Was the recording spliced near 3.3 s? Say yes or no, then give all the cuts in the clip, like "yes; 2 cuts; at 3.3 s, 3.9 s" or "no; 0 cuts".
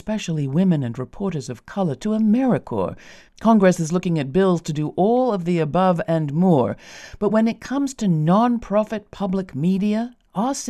yes; 1 cut; at 3.3 s